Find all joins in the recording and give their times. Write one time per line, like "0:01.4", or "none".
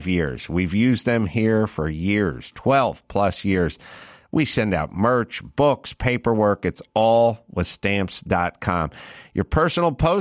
none